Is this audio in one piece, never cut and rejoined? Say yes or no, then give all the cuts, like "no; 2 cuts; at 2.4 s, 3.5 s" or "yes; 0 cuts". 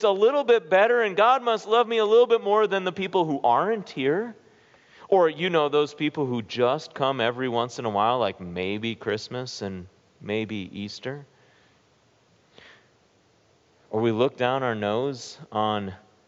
yes; 0 cuts